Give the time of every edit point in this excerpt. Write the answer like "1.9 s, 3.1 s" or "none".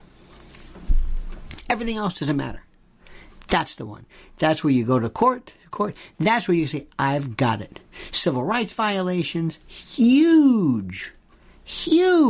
none